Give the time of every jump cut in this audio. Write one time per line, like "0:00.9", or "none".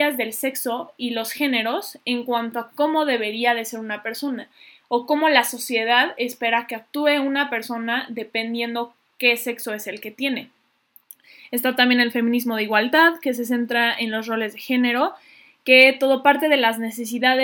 none